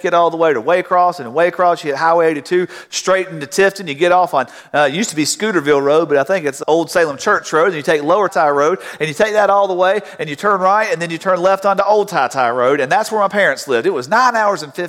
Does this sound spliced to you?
yes; 2 cuts; at 6.6 s, 8.3 s

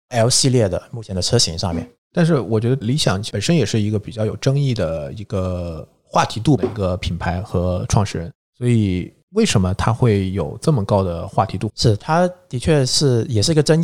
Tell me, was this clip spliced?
no; 0 cuts

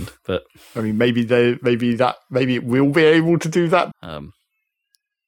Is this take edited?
yes; 1 cut; at 3.9 s

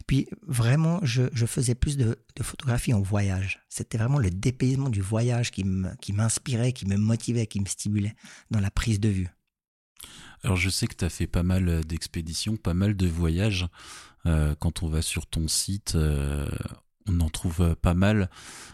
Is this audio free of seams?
yes; 0 cuts

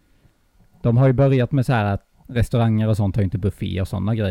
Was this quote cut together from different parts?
yes; 1 cut; at 2.1 s

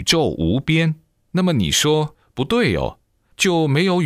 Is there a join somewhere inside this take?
no; 0 cuts

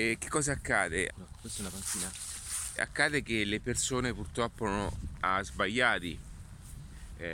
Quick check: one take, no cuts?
no; 3 cuts; at 1.1 s, 2.8 s, 5.2 s

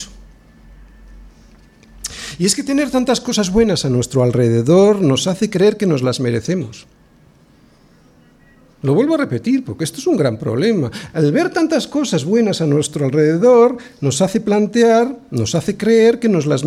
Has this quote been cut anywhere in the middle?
no; 0 cuts

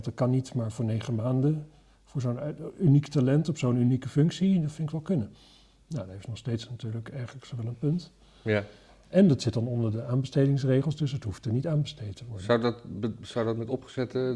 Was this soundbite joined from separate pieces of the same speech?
no; 0 cuts

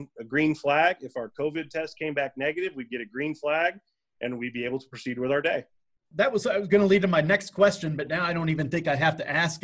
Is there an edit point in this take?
no; 0 cuts

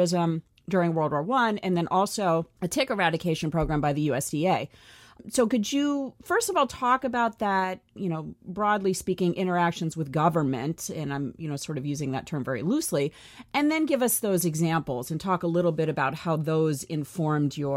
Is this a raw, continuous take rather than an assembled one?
yes; 0 cuts

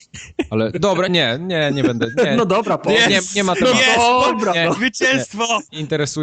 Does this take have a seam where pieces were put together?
yes; 1 cut; at 1.1 s

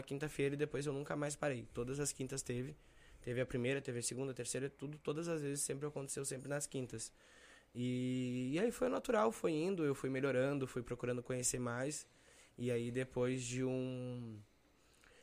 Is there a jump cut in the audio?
no; 0 cuts

